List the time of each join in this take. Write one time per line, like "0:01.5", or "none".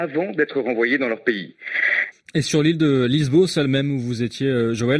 0:02.1